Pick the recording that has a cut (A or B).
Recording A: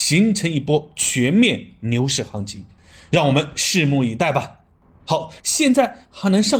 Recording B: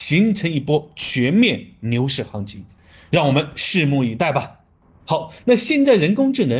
A